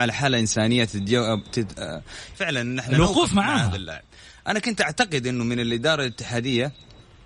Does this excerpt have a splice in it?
yes; 1 cut; at 2.3 s

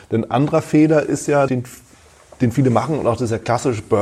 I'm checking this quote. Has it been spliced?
yes; 1 cut; at 1.5 s

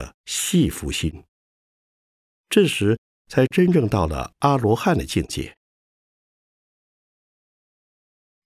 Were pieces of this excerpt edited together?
no; 0 cuts

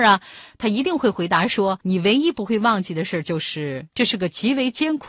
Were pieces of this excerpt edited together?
no; 0 cuts

